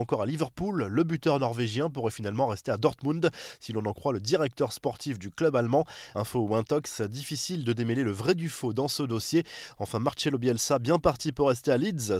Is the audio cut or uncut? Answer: cut